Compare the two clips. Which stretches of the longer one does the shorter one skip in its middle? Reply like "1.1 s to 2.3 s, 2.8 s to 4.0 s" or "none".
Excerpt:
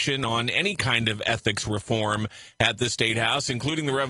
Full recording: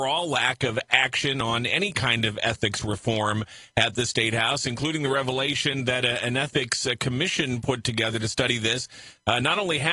none